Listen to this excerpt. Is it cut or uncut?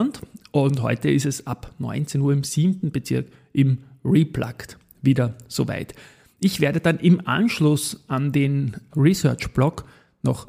cut